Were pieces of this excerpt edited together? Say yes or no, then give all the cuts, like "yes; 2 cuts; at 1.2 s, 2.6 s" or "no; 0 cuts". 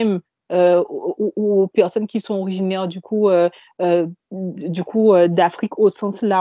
no; 0 cuts